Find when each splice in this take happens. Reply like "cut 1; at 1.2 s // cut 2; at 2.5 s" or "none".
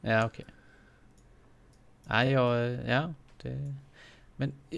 none